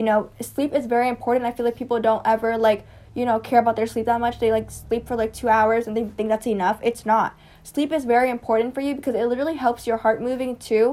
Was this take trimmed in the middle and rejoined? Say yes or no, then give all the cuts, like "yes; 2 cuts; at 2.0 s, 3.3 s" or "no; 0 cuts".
no; 0 cuts